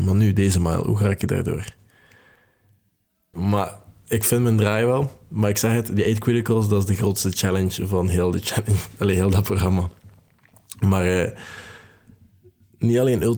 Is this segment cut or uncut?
cut